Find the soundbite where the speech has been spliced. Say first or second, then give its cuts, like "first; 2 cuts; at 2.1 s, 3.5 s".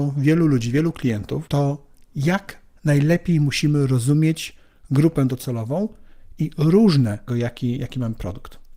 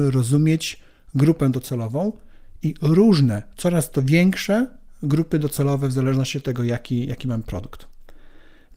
first; 2 cuts; at 1.5 s, 7.3 s